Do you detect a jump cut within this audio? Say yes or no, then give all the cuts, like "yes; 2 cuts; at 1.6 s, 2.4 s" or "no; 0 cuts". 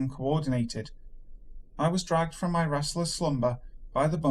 yes; 1 cut; at 1.6 s